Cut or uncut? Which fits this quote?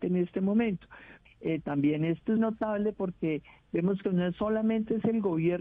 cut